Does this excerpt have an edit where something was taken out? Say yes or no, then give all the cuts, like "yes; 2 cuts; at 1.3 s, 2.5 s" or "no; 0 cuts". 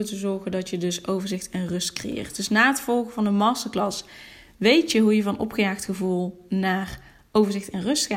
no; 0 cuts